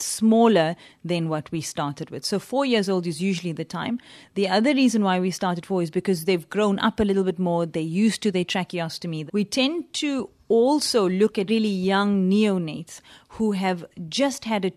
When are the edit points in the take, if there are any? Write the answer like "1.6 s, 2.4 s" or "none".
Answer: 9.3 s, 11.5 s